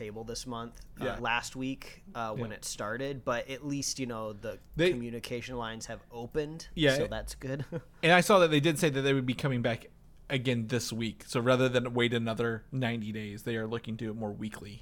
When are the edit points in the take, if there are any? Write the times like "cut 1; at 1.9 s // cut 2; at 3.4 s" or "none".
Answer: cut 1; at 1.2 s

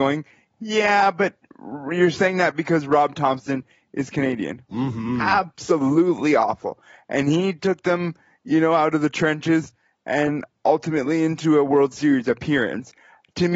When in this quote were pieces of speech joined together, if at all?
cut 1; at 4.7 s

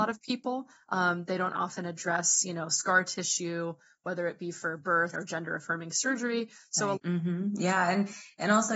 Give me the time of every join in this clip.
cut 1; at 5.1 s // cut 2; at 6.9 s

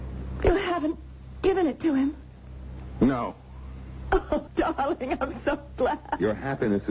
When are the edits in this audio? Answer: cut 1; at 4.5 s

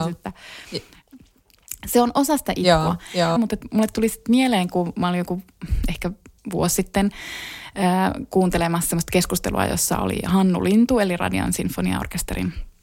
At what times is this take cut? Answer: cut 1; at 3.4 s

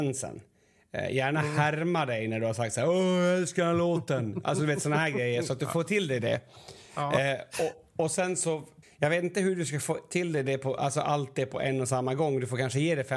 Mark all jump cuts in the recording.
cut 1; at 8.8 s

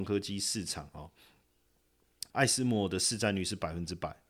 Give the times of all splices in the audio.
cut 1; at 2.3 s

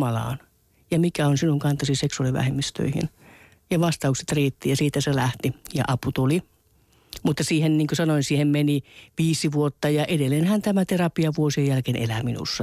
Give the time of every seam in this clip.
none

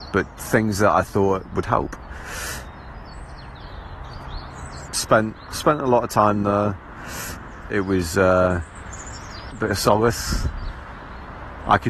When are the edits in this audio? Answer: cut 1; at 4.9 s // cut 2; at 7.7 s // cut 3; at 9.5 s

